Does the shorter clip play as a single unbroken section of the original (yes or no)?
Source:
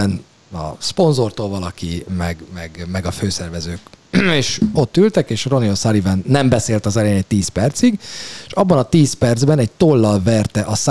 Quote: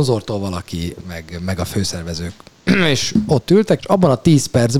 no